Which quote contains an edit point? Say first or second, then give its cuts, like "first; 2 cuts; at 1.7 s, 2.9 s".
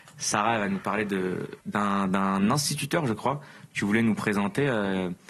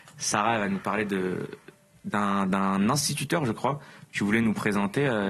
first; 1 cut; at 1.6 s